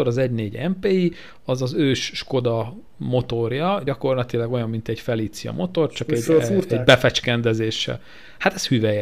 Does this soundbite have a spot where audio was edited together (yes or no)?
no